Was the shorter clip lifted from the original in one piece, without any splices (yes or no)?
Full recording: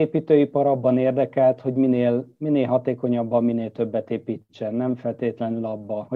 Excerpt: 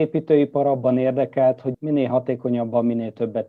no